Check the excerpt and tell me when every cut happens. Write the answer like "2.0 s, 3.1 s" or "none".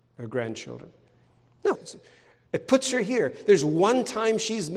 1.8 s

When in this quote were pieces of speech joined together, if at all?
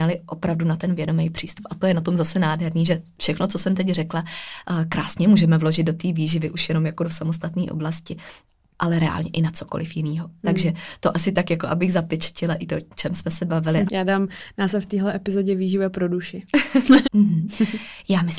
13.9 s, 17.0 s

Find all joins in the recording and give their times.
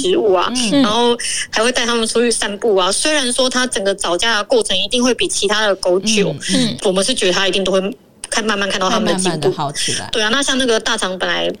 6.8 s

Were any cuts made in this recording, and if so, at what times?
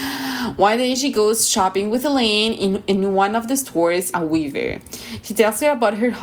4.1 s

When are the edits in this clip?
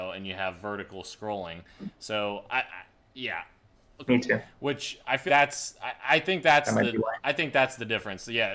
4.1 s, 5.3 s

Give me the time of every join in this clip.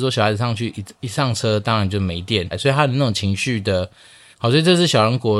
2.5 s, 4.3 s

